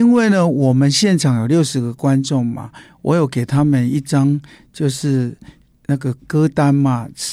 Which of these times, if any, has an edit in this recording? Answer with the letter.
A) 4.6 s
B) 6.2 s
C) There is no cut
B